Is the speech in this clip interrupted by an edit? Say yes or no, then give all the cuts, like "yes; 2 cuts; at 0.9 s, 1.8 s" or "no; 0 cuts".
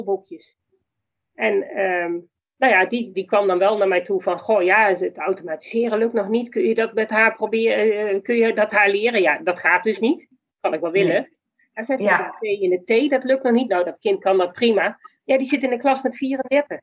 yes; 1 cut; at 3.1 s